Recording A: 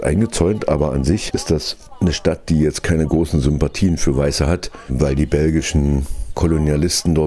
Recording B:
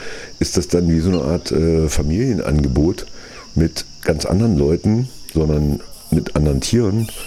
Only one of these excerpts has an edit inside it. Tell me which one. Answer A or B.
B